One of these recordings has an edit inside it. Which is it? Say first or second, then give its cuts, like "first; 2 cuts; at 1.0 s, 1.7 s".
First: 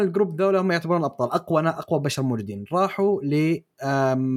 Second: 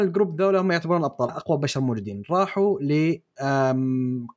second; 1 cut; at 1.3 s